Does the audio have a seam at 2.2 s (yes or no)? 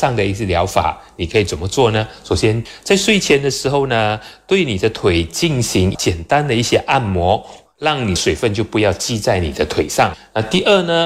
no